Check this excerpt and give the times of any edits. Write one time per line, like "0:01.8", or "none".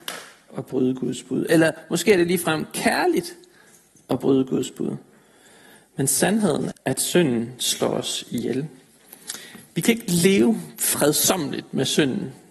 0:06.7